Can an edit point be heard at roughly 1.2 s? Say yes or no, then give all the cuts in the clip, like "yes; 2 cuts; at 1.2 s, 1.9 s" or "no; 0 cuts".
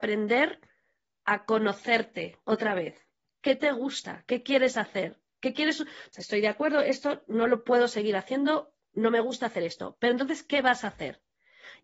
no; 1 cut; at 6.1 s